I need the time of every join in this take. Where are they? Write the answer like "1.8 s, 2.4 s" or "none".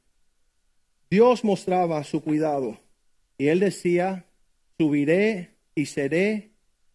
3.3 s, 4.7 s